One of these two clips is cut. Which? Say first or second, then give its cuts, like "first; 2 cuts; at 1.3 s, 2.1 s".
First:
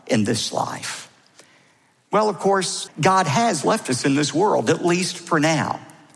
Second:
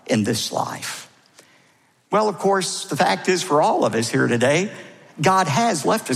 first; 1 cut; at 2.9 s